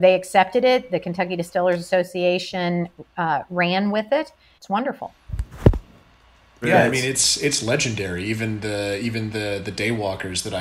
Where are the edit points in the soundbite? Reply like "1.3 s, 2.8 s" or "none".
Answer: 4.6 s